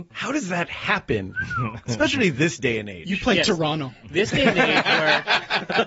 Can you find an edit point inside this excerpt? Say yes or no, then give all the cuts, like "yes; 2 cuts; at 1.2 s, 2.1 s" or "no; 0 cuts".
no; 0 cuts